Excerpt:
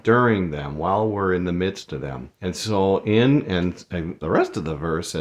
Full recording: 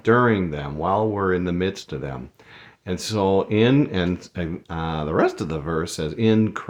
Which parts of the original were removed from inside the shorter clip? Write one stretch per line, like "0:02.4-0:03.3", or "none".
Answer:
0:02.3-0:02.8
0:04.7-0:05.1